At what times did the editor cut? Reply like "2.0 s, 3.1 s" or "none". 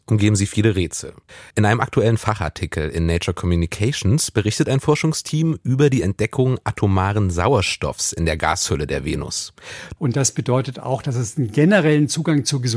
1.5 s, 10.0 s